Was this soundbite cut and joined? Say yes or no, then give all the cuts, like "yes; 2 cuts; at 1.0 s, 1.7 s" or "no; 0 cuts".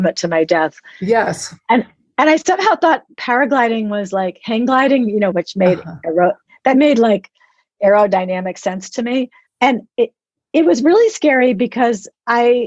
yes; 2 cuts; at 5.3 s, 9.5 s